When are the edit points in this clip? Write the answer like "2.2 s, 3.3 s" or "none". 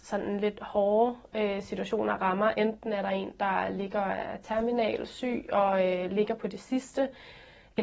none